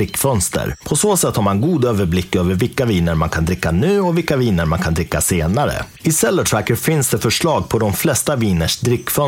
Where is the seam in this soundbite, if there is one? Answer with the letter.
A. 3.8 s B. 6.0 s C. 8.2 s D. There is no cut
D